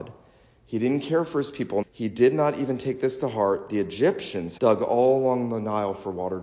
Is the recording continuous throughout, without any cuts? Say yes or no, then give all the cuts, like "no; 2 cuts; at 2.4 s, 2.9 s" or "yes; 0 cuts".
no; 2 cuts; at 1.8 s, 4.6 s